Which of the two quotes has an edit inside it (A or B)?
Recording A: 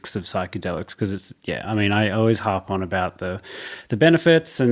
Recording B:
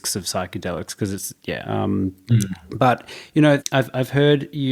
B